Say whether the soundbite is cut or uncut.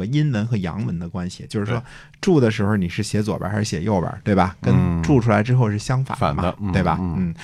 uncut